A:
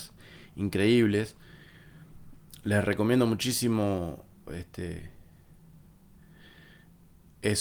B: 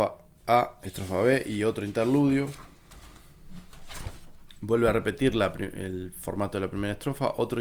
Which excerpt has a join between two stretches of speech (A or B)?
A